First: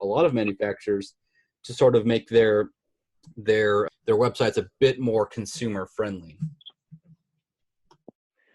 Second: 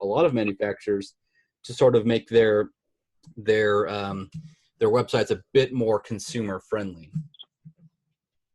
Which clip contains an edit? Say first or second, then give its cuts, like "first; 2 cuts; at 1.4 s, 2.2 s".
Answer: first; 1 cut; at 3.9 s